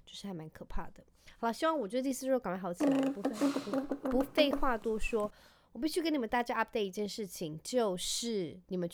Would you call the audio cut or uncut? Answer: uncut